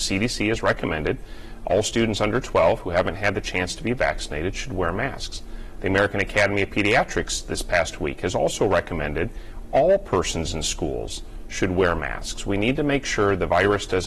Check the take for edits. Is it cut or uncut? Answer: uncut